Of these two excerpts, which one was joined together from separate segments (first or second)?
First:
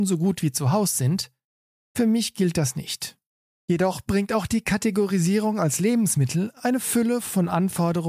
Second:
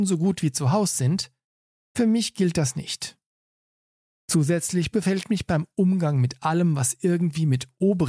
first